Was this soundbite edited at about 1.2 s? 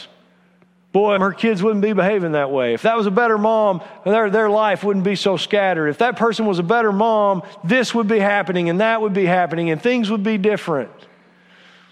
yes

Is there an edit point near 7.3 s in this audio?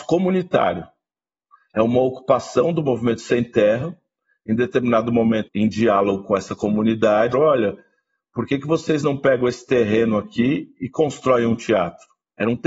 yes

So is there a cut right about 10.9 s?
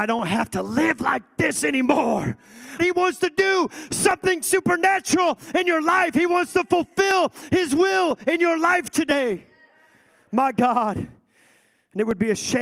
no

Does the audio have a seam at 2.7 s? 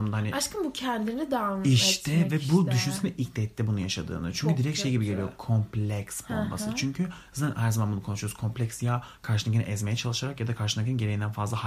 no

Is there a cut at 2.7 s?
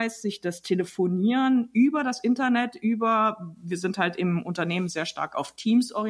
no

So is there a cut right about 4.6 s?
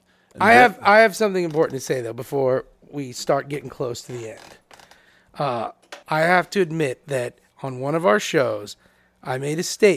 no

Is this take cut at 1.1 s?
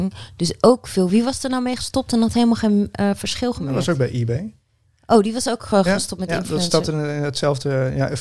no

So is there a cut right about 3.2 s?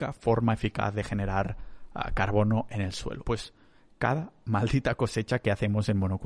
yes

